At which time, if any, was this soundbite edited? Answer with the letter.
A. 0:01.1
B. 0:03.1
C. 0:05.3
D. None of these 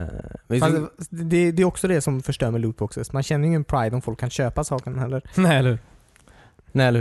D